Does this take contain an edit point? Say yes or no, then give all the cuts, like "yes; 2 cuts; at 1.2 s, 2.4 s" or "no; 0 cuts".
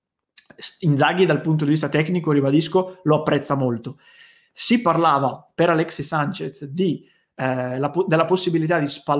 yes; 1 cut; at 4.5 s